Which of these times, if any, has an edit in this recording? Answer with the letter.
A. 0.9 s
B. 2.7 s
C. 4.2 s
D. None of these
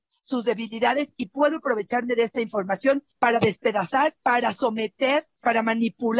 C